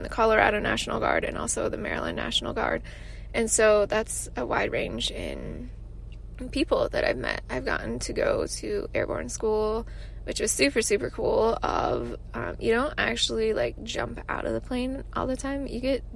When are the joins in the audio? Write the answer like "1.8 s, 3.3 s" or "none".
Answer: none